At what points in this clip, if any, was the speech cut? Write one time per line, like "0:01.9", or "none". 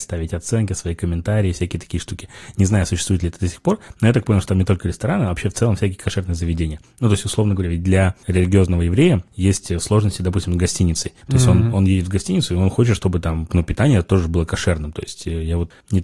0:11.2

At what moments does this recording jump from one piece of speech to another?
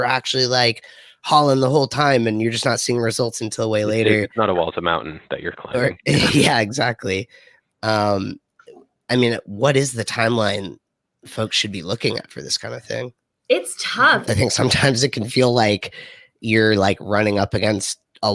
0:14.3

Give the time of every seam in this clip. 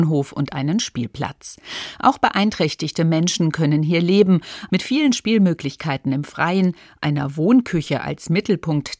0:04.7

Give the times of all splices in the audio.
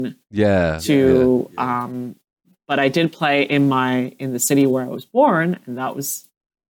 none

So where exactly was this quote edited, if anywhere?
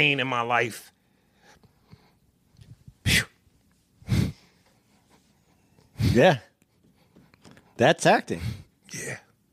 none

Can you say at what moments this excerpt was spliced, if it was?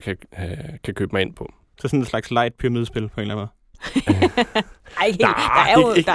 none

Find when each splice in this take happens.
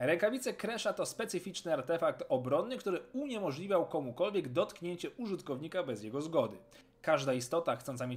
none

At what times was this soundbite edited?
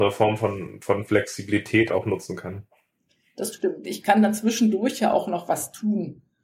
0:01.9
0:03.8

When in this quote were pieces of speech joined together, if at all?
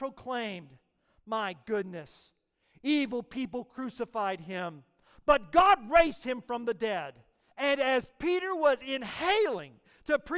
0:07.5

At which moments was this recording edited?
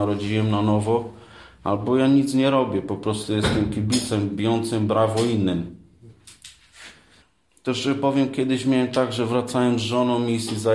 none

